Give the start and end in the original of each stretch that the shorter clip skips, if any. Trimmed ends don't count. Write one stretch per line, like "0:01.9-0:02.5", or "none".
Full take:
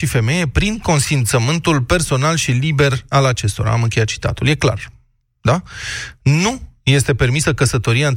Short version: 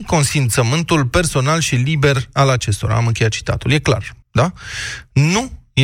0:05.0-0:05.3